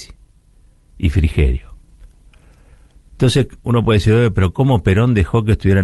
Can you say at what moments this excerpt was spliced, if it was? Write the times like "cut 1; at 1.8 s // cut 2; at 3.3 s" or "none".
none